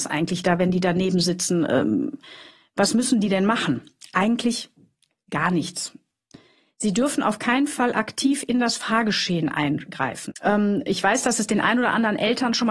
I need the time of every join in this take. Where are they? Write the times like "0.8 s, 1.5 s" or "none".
10.3 s